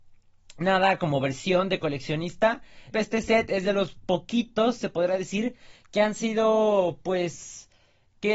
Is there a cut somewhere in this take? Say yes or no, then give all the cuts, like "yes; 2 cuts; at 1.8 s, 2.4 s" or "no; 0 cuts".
yes; 1 cut; at 2.9 s